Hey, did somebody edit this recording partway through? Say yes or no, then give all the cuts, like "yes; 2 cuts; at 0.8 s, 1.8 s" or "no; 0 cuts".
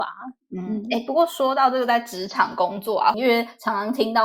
yes; 1 cut; at 3.1 s